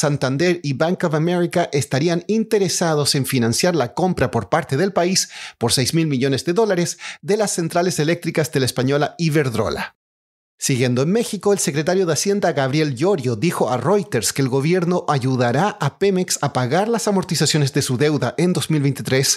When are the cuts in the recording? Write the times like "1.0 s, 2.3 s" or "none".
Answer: none